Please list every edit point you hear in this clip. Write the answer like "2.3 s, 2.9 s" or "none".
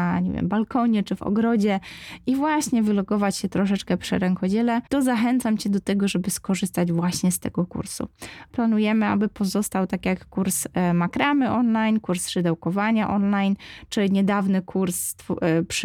4.9 s, 8.5 s